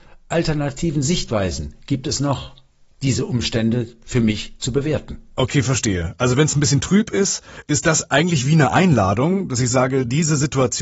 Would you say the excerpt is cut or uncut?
uncut